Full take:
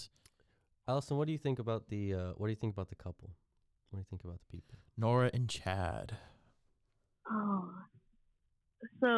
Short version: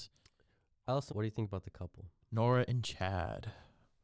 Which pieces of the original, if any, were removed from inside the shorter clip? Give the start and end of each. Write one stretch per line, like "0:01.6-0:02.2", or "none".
0:01.1-0:02.3
0:03.5-0:04.9

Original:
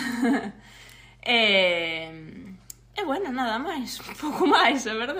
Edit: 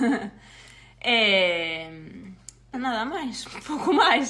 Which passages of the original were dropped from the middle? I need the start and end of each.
0:03.0-0:03.3

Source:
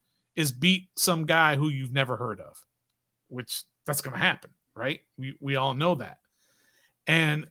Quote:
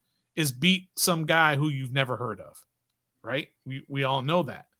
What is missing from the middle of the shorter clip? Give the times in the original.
0:03.1-0:04.6

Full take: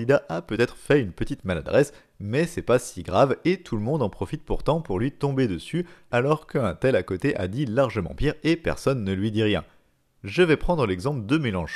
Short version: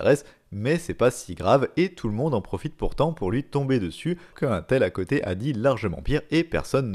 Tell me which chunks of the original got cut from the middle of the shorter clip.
0:06.0-0:06.5

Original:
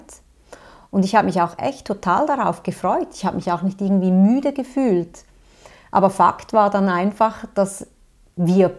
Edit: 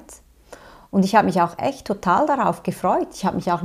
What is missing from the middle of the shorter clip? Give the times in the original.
none

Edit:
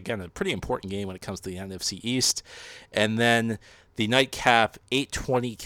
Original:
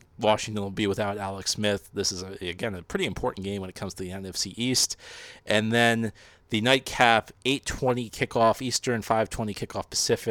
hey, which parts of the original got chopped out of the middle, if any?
none

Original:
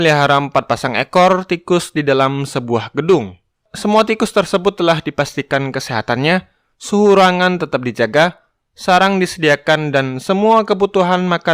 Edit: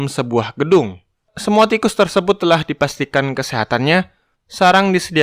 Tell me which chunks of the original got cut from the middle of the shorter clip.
0:06.7-0:08.6

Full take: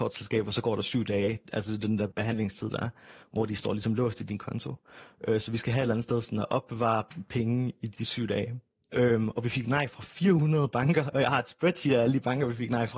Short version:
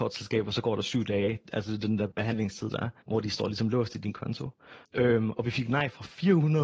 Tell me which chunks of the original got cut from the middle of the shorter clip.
0:03.0-0:03.3
0:05.1-0:08.8

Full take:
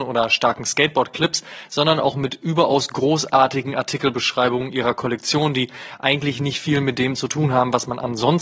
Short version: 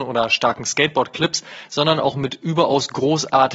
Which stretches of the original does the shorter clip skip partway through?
none

